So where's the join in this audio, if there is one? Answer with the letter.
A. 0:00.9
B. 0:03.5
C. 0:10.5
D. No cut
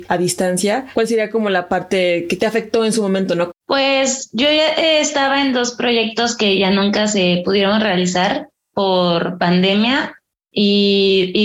B